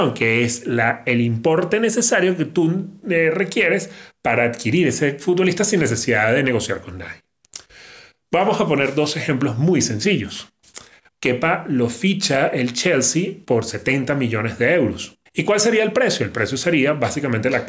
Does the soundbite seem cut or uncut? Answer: cut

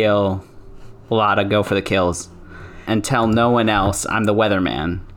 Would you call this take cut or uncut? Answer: cut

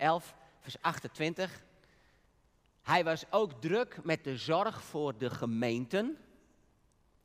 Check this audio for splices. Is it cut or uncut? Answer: uncut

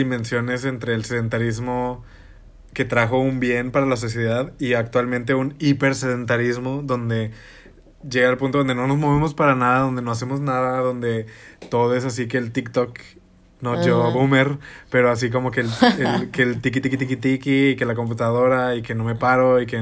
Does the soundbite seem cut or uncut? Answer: uncut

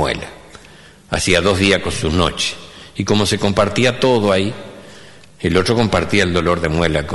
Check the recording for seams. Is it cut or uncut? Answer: uncut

